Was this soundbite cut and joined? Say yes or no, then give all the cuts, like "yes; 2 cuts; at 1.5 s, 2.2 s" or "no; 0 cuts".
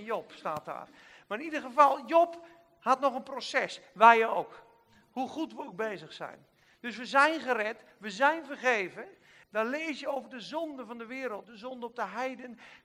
yes; 2 cuts; at 9.4 s, 11.4 s